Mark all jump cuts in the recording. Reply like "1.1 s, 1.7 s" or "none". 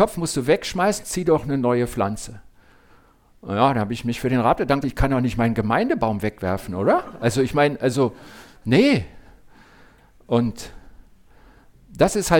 4.8 s